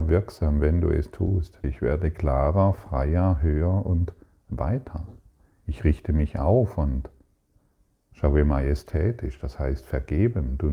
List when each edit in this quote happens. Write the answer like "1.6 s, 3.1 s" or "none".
1.6 s